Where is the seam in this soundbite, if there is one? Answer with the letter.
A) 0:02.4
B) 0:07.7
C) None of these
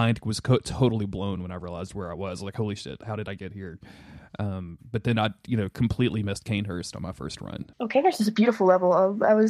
B